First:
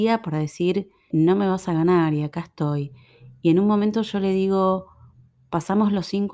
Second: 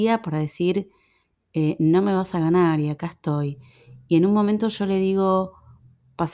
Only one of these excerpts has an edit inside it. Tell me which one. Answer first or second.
first